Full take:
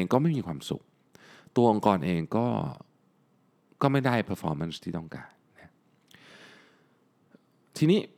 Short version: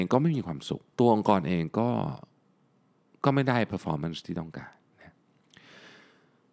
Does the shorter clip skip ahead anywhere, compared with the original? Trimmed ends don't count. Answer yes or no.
yes